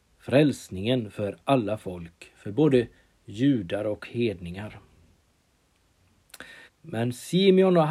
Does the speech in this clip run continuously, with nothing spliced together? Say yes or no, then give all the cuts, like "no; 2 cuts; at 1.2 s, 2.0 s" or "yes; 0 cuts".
no; 1 cut; at 6.7 s